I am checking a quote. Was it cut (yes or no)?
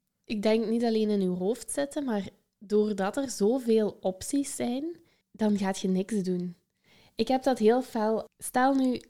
no